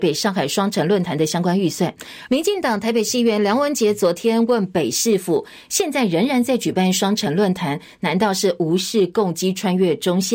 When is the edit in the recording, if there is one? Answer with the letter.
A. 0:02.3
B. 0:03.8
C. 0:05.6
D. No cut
A